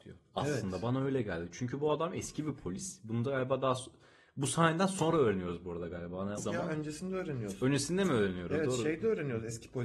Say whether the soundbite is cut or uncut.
cut